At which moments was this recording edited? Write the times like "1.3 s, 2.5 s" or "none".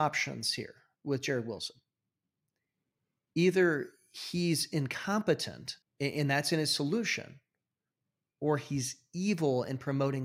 5.8 s